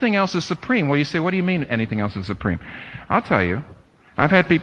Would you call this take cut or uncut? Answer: uncut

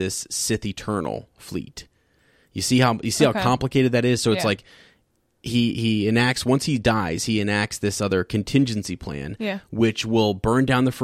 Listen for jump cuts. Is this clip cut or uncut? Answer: uncut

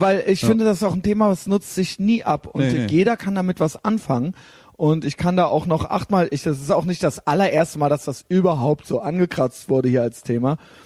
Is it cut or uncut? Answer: uncut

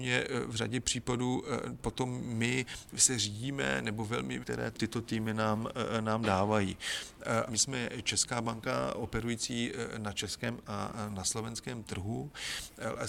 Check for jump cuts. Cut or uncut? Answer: cut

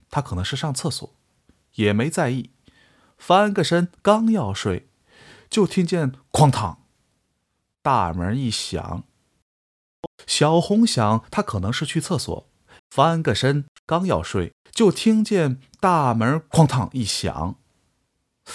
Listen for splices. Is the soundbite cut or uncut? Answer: cut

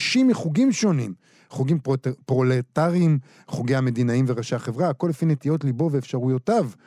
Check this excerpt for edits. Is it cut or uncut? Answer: uncut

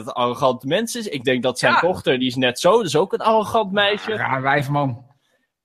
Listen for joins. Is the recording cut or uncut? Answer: uncut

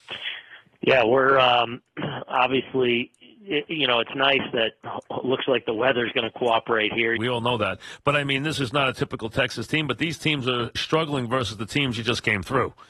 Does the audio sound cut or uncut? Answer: cut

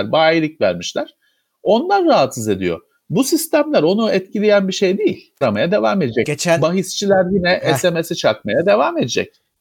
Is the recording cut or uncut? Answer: cut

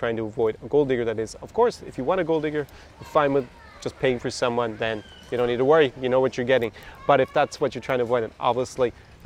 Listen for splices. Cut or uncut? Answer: uncut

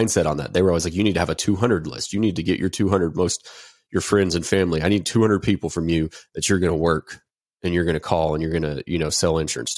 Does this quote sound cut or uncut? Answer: uncut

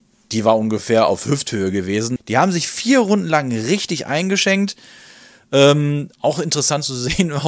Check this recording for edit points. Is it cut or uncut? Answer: cut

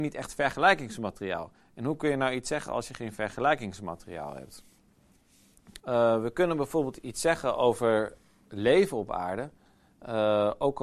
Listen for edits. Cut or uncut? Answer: cut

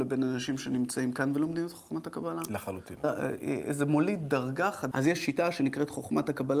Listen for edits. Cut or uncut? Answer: cut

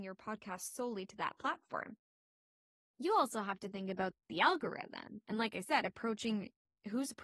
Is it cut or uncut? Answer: uncut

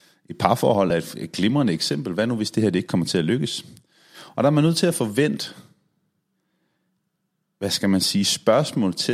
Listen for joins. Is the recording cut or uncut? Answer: uncut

